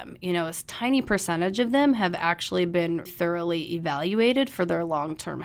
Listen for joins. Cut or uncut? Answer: cut